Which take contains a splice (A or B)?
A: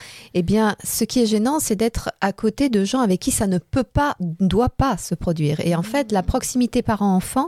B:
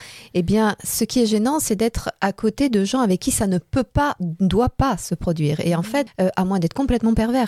B